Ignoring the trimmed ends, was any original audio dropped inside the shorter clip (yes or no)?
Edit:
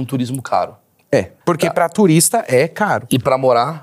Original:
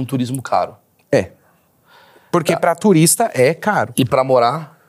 yes